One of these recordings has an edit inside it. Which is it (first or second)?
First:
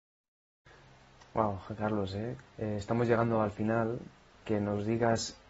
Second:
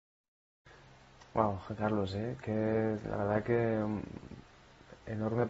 first